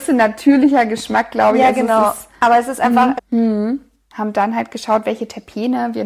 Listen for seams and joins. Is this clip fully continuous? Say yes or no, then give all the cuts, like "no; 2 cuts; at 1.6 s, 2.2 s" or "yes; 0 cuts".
no; 1 cut; at 3.2 s